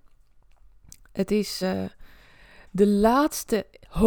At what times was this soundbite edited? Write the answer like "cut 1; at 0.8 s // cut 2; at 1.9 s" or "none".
none